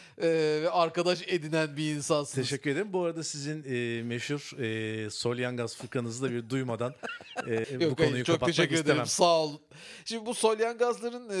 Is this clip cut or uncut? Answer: cut